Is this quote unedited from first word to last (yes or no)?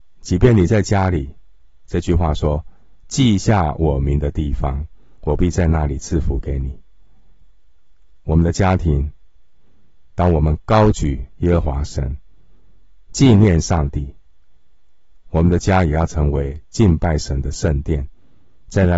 yes